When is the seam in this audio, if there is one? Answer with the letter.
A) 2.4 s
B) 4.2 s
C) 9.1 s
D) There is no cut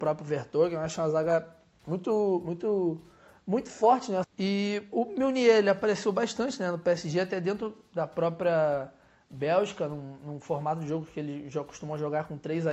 B